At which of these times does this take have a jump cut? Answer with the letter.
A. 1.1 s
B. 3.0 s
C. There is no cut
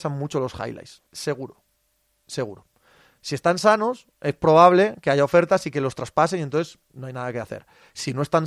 A